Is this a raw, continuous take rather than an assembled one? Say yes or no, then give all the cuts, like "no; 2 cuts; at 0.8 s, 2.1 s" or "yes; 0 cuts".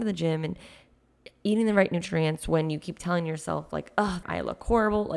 no; 1 cut; at 4.2 s